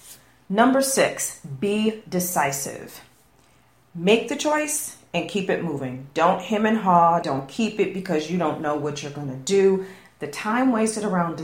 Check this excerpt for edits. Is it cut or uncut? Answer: cut